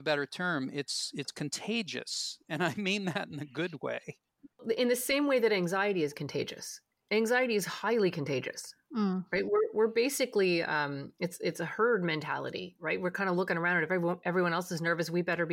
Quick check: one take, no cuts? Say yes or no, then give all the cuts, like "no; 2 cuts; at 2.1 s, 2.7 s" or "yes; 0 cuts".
yes; 0 cuts